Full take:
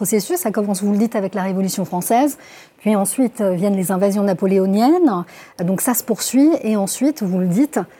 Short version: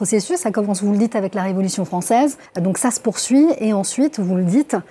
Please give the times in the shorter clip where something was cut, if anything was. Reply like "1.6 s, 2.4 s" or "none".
2.5 s